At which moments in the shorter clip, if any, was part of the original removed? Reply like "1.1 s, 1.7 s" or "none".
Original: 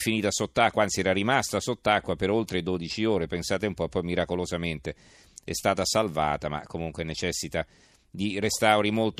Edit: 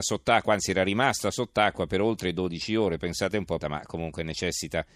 3.6 s